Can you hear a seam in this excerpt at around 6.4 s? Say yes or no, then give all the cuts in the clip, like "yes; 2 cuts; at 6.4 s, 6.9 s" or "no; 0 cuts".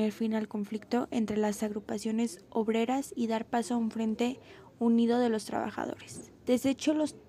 yes; 1 cut; at 6.4 s